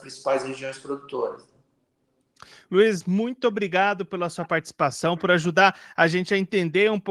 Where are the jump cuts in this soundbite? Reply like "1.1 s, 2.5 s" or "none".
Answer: none